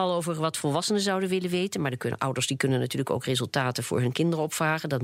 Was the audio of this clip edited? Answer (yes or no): no